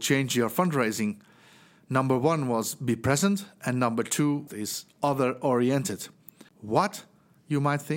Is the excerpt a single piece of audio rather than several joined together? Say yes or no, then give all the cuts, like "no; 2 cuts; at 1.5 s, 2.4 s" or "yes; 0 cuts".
no; 2 cuts; at 4.5 s, 6.5 s